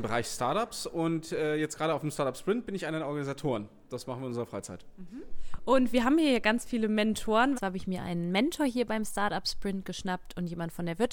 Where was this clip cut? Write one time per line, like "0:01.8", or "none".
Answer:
0:07.5